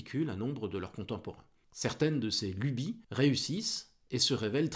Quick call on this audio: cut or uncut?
cut